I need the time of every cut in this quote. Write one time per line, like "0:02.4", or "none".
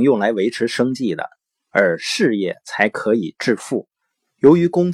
none